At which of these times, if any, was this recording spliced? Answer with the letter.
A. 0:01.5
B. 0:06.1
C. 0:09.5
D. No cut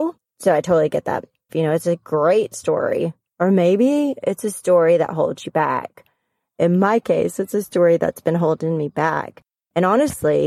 A